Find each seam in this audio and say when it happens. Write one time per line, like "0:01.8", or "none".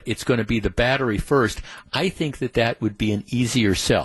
none